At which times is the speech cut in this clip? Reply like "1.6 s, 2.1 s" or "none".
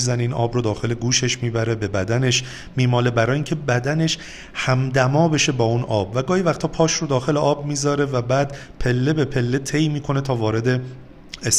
none